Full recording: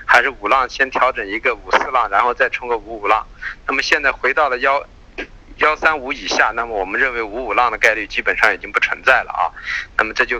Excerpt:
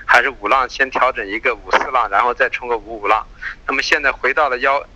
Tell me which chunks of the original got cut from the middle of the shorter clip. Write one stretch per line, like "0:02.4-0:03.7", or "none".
none

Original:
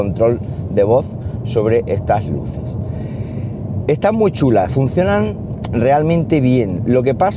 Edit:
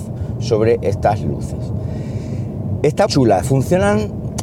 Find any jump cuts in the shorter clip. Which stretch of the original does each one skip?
0:04.1-0:04.3

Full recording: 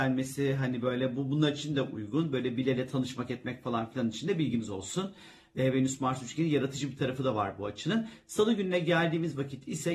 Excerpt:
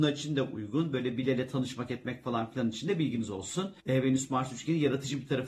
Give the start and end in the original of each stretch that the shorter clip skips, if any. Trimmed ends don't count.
0:05.2-0:05.5

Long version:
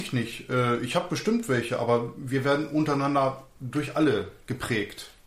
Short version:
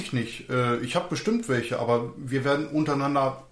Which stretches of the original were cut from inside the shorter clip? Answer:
none

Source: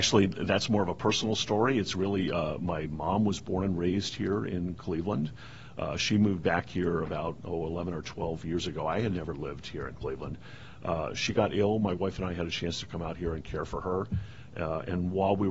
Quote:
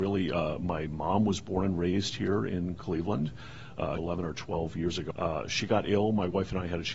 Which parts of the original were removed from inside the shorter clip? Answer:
0:06.0-0:07.7
0:08.8-0:10.8

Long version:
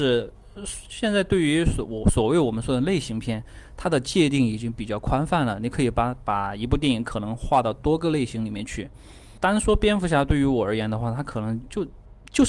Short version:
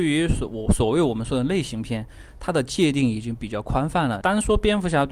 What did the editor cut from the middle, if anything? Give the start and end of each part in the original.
0:05.6-0:09.4

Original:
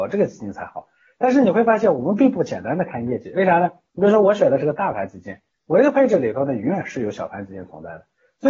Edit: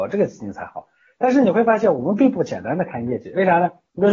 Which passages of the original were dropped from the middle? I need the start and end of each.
none

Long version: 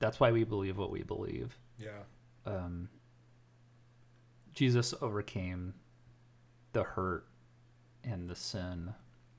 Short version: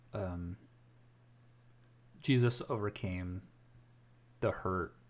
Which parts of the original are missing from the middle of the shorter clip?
none

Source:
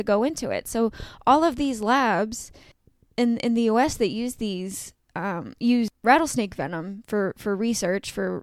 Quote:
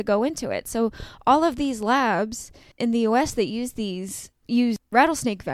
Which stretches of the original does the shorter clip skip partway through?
0:02.8-0:03.4
0:05.1-0:05.5

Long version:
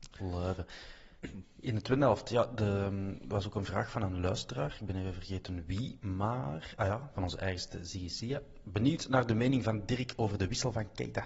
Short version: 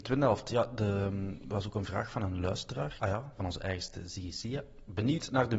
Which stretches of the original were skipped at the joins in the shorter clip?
0:04.8-0:06.8

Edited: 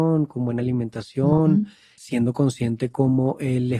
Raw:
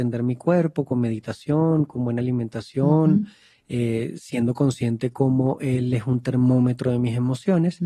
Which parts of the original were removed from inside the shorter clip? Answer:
0:03.6-0:04.2

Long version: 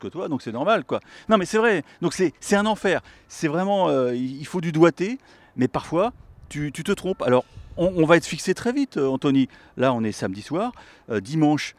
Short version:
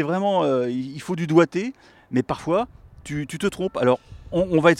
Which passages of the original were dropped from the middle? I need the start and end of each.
none

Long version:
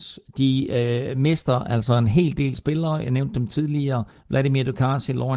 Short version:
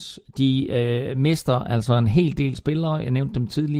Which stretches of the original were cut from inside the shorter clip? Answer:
none

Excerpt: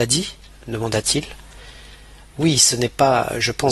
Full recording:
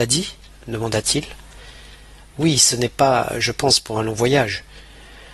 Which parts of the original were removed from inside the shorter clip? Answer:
none

